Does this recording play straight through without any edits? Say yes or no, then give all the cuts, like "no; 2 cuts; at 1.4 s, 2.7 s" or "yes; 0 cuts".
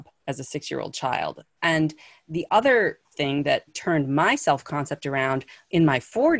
no; 2 cuts; at 1.6 s, 3.7 s